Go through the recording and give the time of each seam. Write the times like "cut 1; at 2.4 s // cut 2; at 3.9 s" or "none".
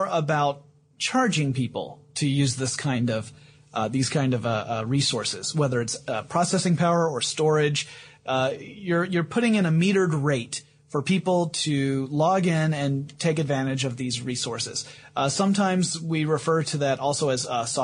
none